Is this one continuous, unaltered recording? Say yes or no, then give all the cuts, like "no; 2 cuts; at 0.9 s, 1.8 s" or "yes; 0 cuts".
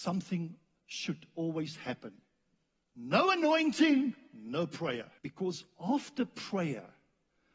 no; 2 cuts; at 2.8 s, 5.2 s